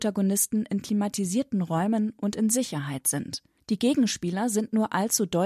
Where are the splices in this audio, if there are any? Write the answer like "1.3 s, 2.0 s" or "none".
3.6 s